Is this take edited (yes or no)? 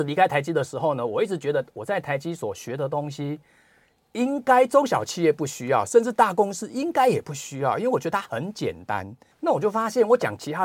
yes